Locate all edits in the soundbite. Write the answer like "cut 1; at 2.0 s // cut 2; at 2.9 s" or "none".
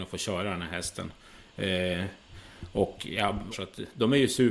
cut 1; at 3.5 s